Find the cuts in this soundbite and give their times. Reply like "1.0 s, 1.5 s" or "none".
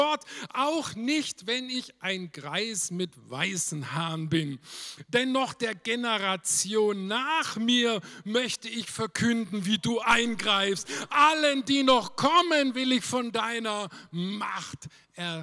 none